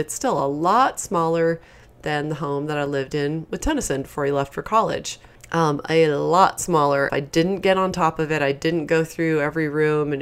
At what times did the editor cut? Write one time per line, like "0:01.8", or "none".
0:07.1